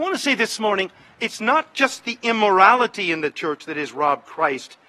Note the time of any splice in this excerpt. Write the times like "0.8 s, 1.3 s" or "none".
none